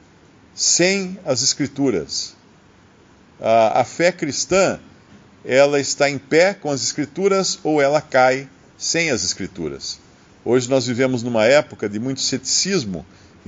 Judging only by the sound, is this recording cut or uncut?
uncut